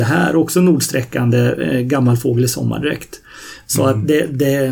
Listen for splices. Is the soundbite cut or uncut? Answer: uncut